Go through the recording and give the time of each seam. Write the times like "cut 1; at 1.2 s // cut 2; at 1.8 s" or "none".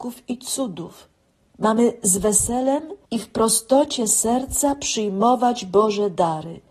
cut 1; at 1.5 s // cut 2; at 3.0 s

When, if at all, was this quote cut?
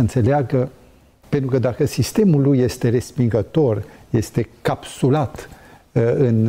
cut 1; at 1.2 s

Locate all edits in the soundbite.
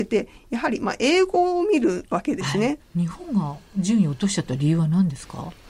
cut 1; at 2.8 s

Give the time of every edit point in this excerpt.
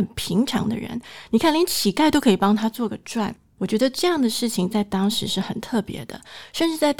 none

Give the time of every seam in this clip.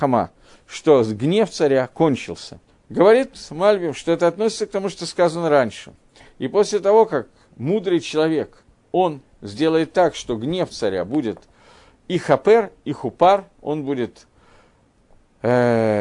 cut 1; at 2.7 s

